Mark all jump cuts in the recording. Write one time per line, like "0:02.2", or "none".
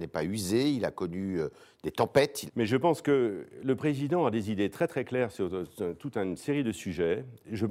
0:02.5